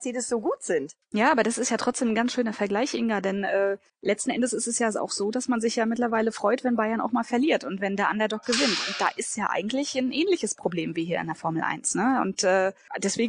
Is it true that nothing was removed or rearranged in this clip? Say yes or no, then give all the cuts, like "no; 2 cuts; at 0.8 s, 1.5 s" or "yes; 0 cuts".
yes; 0 cuts